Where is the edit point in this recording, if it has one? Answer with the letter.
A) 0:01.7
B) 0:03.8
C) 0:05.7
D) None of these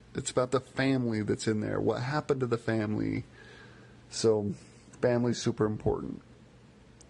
D